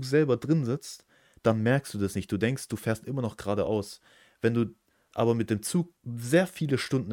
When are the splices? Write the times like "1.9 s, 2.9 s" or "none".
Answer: 6.0 s